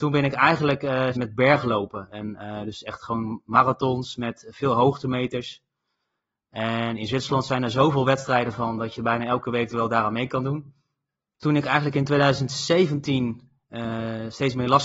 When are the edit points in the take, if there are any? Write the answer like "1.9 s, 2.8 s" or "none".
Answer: 1.1 s